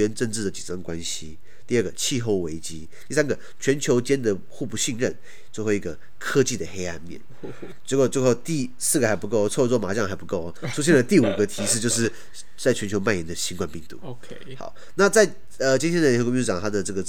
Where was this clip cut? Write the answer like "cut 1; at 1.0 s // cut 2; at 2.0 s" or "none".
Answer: none